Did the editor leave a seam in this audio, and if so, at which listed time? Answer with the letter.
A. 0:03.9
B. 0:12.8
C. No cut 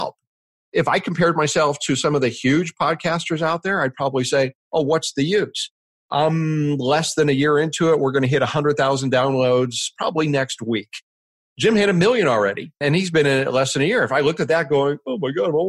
B